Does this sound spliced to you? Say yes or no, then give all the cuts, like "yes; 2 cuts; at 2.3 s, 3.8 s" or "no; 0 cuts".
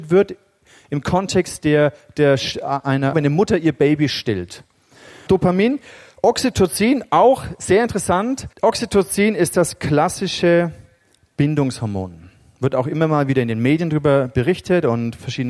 yes; 3 cuts; at 3.1 s, 5.3 s, 8.5 s